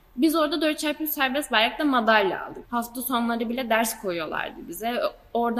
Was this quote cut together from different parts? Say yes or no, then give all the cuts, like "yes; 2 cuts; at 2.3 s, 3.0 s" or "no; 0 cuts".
yes; 1 cut; at 2.6 s